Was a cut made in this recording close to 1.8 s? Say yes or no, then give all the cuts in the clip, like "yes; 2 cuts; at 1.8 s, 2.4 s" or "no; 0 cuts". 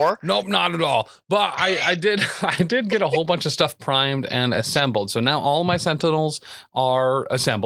no; 0 cuts